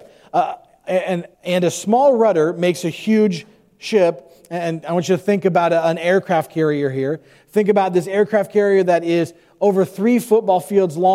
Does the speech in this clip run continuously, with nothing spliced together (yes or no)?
no